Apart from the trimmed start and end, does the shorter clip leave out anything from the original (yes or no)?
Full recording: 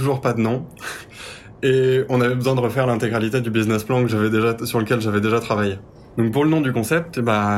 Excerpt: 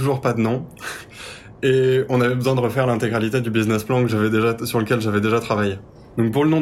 no